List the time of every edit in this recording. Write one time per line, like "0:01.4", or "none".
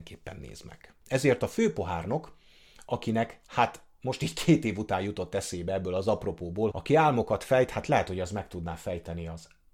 0:01.0
0:06.7